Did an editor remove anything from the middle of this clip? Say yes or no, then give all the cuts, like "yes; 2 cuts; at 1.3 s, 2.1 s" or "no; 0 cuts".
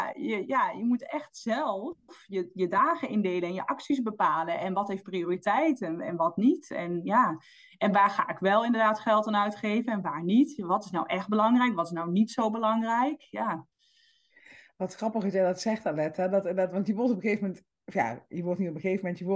no; 0 cuts